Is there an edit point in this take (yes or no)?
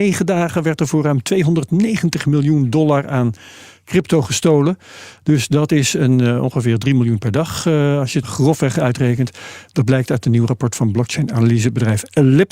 yes